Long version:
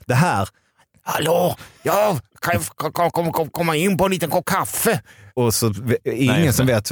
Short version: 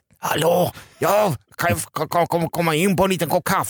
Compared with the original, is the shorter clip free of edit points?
no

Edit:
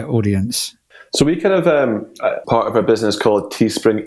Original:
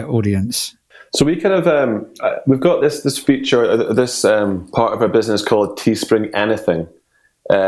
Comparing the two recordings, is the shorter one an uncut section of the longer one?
no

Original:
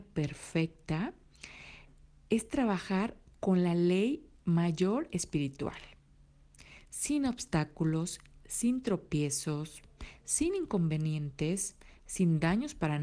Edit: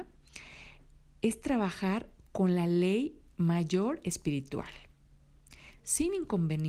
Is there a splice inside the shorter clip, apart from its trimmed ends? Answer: yes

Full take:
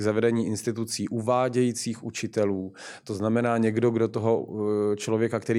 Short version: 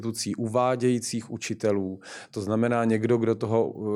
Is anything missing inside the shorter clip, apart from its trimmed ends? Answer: no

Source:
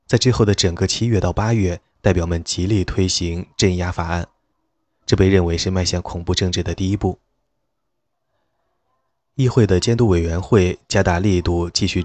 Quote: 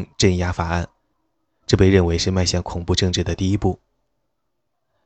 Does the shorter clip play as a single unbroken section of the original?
yes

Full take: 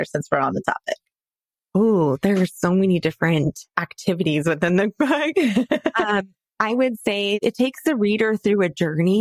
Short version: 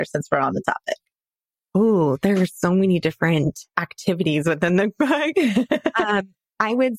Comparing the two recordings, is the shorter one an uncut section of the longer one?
yes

